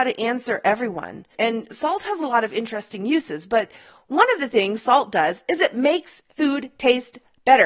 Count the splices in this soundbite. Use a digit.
1